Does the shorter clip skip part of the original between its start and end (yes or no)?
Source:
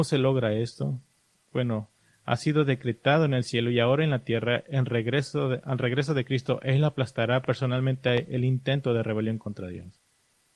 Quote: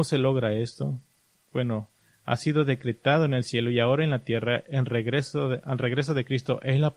no